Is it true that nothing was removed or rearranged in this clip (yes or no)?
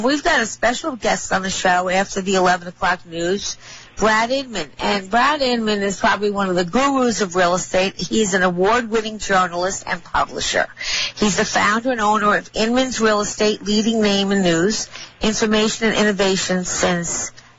yes